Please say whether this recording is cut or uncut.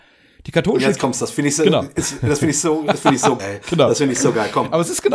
cut